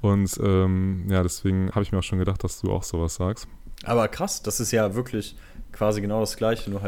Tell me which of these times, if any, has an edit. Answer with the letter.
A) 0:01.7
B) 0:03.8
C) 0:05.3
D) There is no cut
A